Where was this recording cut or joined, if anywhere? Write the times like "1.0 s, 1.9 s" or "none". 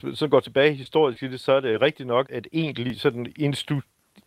2.3 s